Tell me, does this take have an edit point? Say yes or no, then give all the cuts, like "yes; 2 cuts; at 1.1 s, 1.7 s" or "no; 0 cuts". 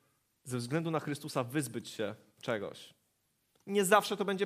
no; 0 cuts